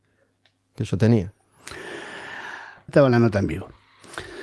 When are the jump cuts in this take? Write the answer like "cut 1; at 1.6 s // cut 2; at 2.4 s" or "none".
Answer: cut 1; at 2.9 s